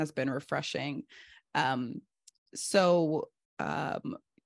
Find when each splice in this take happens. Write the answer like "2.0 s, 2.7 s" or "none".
none